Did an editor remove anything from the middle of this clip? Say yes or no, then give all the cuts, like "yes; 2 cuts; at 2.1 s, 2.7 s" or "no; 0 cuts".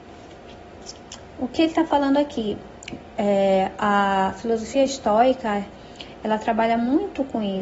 no; 0 cuts